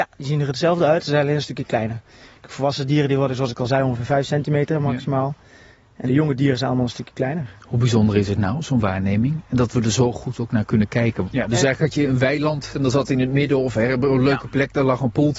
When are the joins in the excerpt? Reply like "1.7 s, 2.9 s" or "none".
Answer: 6.1 s, 7.6 s, 11.2 s